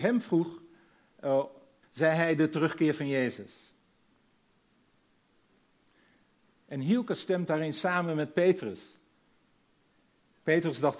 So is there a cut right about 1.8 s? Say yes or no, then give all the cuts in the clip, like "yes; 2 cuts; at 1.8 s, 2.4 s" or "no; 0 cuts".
yes; 1 cut; at 1.8 s